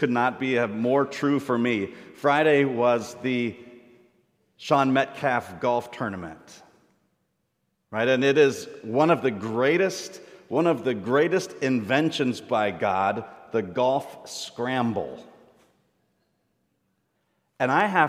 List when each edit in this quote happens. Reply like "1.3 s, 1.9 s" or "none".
none